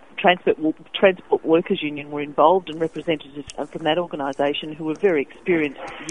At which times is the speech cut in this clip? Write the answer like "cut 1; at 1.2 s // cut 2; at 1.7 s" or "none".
cut 1; at 3.5 s